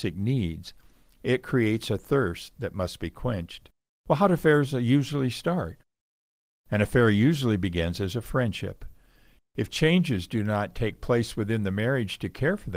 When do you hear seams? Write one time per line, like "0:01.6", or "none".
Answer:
0:03.9
0:09.4